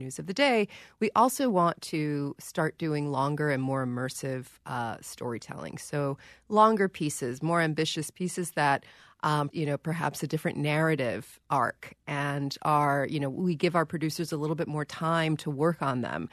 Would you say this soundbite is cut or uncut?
cut